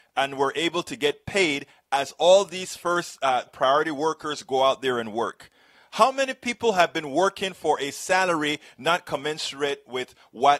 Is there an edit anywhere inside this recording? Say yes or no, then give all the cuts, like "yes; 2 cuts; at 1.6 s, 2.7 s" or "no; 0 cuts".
yes; 1 cut; at 3.5 s